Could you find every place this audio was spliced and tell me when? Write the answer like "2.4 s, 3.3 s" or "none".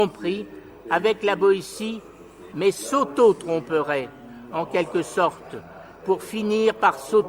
2.5 s

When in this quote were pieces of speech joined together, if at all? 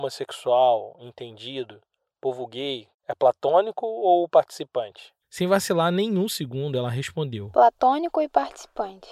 2.9 s

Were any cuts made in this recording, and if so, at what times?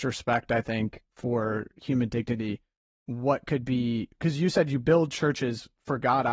none

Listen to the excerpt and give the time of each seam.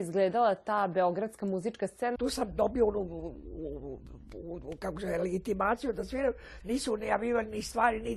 2.2 s, 6.6 s

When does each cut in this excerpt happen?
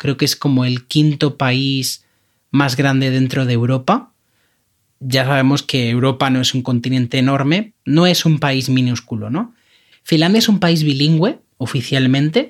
7.7 s, 9.9 s

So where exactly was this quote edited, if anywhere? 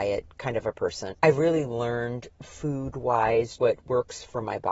1.1 s, 3.6 s

